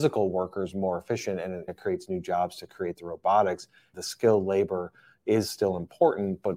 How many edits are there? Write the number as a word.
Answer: two